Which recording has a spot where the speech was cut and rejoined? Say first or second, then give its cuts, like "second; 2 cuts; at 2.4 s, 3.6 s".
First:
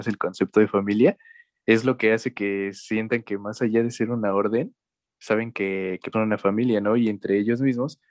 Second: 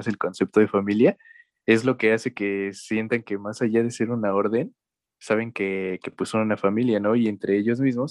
first; 1 cut; at 6.1 s